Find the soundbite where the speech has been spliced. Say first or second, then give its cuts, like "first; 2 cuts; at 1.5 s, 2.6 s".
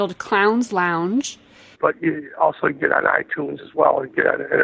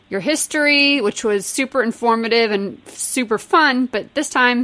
first; 1 cut; at 1.7 s